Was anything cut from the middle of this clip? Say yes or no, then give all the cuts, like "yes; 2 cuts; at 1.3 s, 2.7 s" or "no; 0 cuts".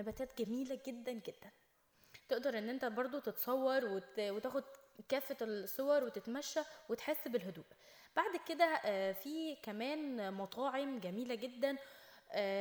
yes; 1 cut; at 1.0 s